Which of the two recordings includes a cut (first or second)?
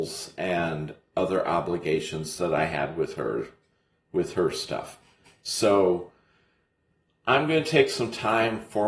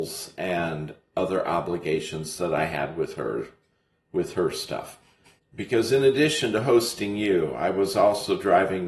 second